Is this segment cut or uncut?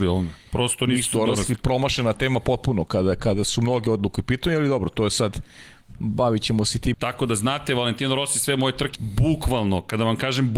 cut